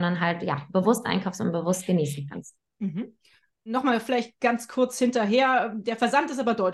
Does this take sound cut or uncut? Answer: uncut